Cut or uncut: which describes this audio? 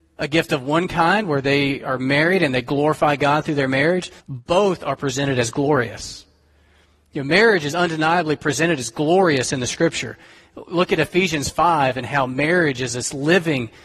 cut